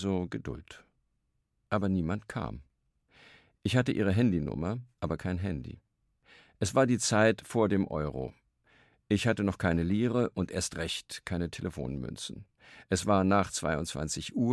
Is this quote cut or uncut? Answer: uncut